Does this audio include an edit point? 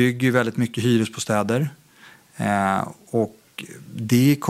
no; 0 cuts

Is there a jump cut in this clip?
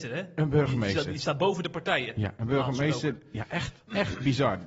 no; 0 cuts

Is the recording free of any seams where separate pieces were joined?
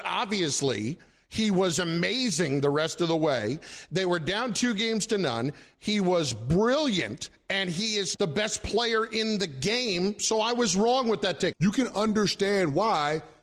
no; 2 cuts; at 8.1 s, 11.5 s

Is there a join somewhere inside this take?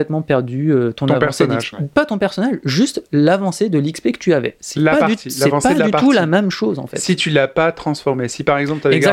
yes; 1 cut; at 1.7 s

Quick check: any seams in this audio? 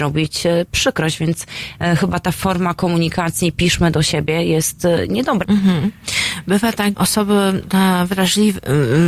yes; 2 cuts; at 5.4 s, 6.9 s

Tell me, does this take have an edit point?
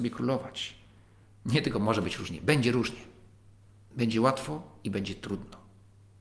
yes; 1 cut; at 1.2 s

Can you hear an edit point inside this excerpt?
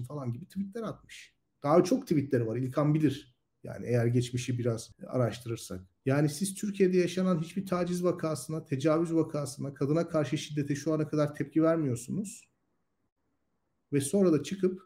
no; 0 cuts

